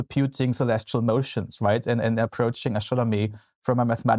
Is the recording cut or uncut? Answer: uncut